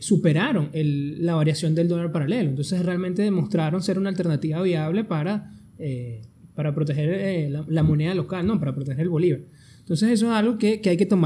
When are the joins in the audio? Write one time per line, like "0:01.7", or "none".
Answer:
none